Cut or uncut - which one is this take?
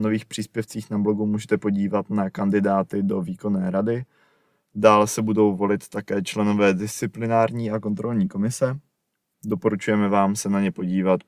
uncut